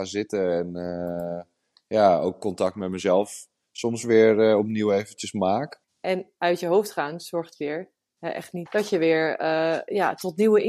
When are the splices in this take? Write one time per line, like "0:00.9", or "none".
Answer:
0:05.8
0:08.7